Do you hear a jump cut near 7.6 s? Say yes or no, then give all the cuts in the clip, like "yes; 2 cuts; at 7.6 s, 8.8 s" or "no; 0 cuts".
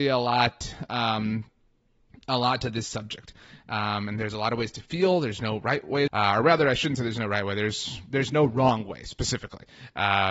no; 1 cut; at 6.1 s